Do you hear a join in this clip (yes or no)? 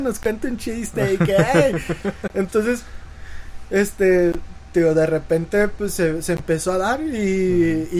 no